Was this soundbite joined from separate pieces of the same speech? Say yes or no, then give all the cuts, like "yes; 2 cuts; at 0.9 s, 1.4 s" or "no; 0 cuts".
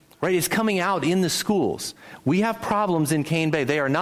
no; 0 cuts